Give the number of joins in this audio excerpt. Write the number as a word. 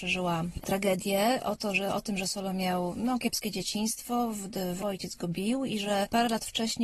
one